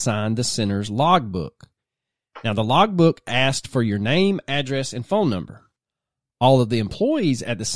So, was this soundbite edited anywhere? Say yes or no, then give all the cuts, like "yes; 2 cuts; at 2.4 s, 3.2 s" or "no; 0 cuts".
no; 0 cuts